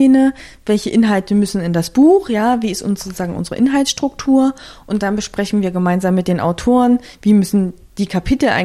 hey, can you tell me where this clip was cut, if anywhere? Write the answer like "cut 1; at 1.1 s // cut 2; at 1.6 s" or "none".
none